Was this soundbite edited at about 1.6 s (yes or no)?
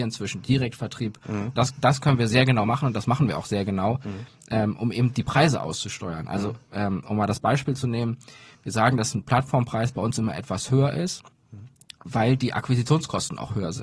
yes